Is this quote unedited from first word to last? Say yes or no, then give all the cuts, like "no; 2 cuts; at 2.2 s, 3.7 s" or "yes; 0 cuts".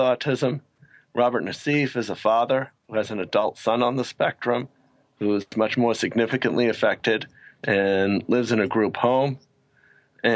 yes; 0 cuts